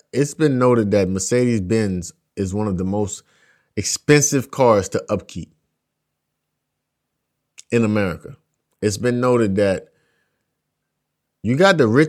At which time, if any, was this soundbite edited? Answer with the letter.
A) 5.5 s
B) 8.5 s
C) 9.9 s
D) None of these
D